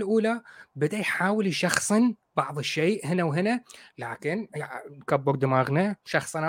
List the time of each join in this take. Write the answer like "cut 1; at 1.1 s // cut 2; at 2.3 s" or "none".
none

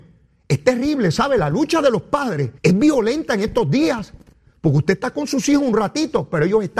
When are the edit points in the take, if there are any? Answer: cut 1; at 2.6 s

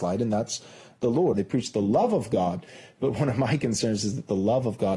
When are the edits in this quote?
cut 1; at 1.3 s

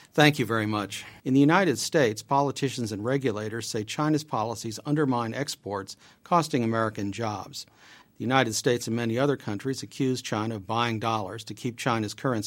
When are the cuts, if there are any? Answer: cut 1; at 1.2 s // cut 2; at 8.0 s

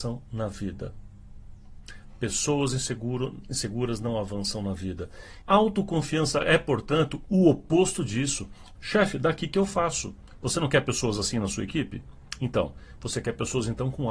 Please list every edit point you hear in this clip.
cut 1; at 5.4 s // cut 2; at 8.8 s

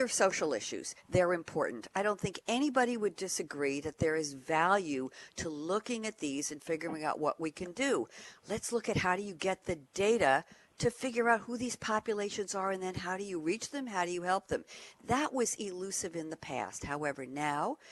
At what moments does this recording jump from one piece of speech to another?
none

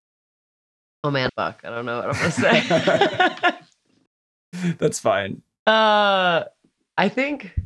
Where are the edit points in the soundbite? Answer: cut 1; at 1.3 s

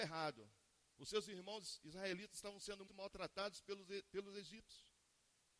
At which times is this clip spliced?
cut 1; at 2.9 s

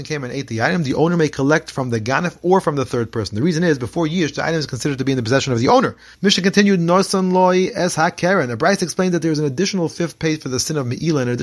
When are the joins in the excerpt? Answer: cut 1; at 6.1 s

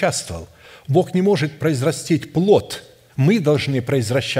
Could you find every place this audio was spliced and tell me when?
cut 1; at 3.1 s

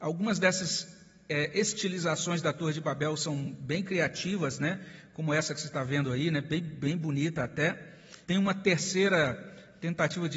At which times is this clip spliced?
cut 1; at 8.2 s

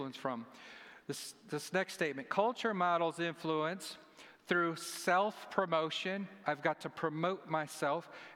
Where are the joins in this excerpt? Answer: none

